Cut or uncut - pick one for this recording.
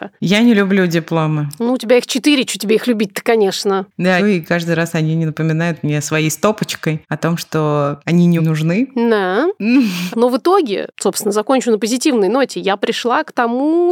cut